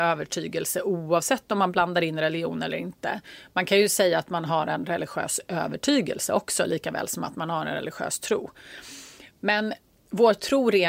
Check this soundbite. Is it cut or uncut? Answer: uncut